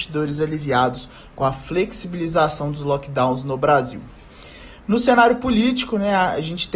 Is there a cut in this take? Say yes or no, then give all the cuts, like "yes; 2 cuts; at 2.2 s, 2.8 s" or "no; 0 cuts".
no; 0 cuts